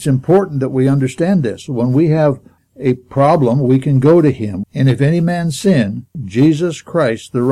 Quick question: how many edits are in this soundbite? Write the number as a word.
three